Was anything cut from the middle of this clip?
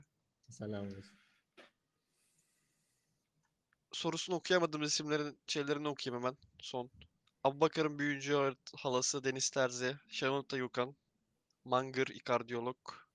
no; 0 cuts

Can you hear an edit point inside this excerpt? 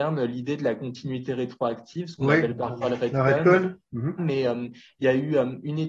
yes; 1 cut; at 4.2 s

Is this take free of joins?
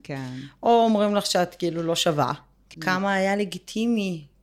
no; 1 cut; at 2.7 s

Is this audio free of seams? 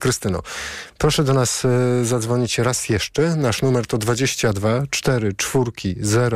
yes; 0 cuts

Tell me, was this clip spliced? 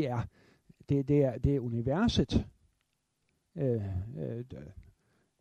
no; 0 cuts

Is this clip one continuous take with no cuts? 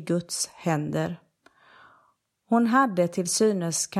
yes; 0 cuts

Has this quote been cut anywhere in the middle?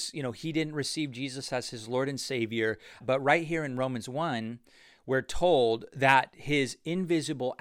yes; 1 cut; at 3.0 s

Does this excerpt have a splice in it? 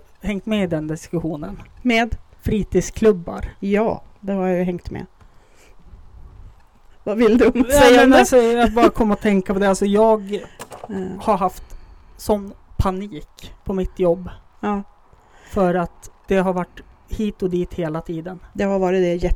no; 0 cuts

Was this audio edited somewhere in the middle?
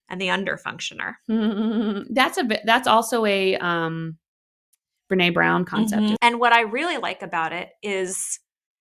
yes; 1 cut; at 6.2 s

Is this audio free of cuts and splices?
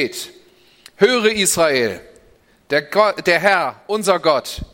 yes; 0 cuts

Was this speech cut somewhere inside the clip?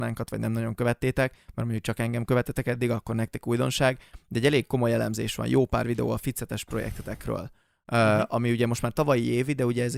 no; 0 cuts

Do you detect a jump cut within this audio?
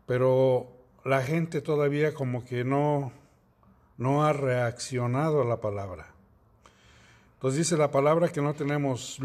no; 0 cuts

